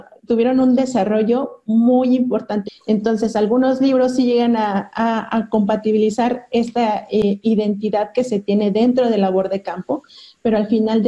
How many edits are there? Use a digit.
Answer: 1